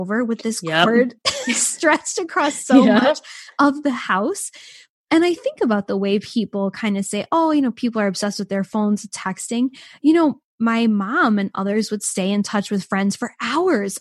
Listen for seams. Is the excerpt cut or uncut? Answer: uncut